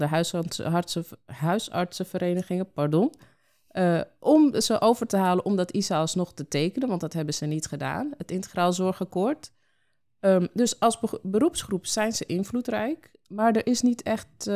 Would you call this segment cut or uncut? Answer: uncut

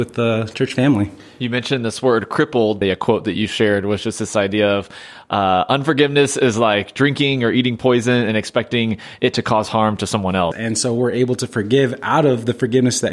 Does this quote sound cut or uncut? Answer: cut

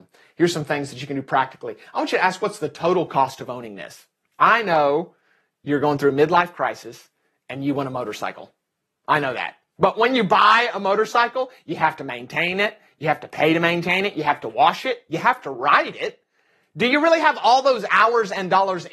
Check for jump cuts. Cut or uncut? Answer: uncut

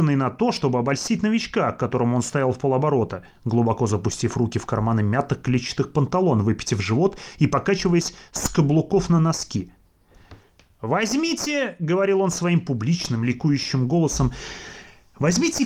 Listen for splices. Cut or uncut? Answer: uncut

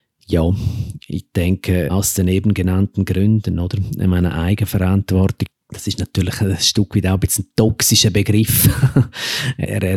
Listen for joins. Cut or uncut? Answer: uncut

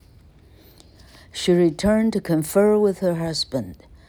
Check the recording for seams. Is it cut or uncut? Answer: uncut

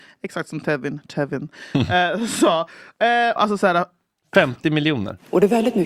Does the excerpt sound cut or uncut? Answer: cut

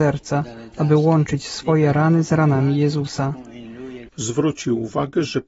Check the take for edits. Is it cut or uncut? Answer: cut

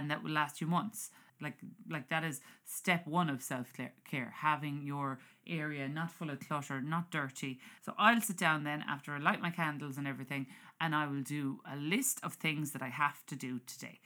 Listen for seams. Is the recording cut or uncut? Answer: cut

